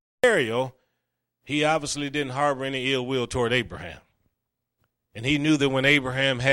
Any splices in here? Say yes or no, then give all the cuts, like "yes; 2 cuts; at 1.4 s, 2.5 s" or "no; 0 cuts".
no; 0 cuts